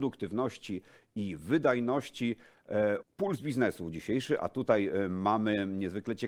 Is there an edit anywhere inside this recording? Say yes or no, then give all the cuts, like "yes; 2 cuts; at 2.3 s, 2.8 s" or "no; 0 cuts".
yes; 1 cut; at 3.0 s